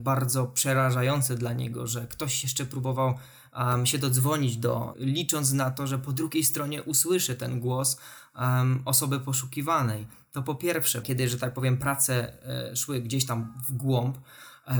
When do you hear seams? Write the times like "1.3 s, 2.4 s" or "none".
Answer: 4.9 s, 11.0 s